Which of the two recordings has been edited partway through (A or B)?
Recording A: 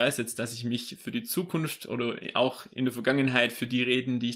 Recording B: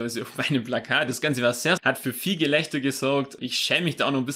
B